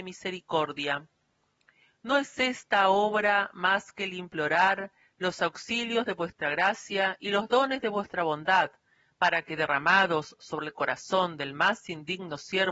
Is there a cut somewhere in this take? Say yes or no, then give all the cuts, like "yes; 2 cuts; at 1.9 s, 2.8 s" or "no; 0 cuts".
no; 0 cuts